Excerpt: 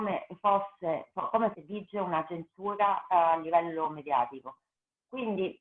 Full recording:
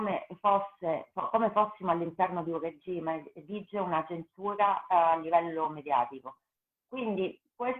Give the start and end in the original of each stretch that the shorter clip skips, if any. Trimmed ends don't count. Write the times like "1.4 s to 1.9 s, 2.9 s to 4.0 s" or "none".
1.5 s to 3.3 s